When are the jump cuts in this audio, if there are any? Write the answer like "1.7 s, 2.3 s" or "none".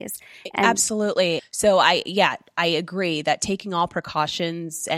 1.4 s